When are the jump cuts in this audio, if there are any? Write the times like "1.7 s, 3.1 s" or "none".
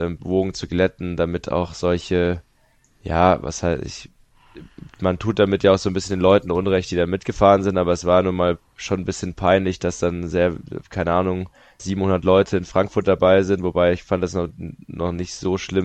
11.8 s